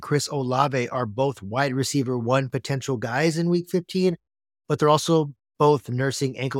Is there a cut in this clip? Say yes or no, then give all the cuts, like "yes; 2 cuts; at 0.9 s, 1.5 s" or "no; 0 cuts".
no; 0 cuts